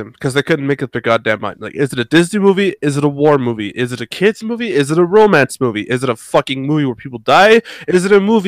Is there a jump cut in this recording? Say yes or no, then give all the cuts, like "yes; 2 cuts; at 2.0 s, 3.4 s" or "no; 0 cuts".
no; 0 cuts